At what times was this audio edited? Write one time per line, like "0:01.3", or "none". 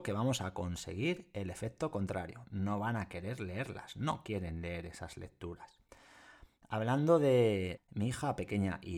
0:07.8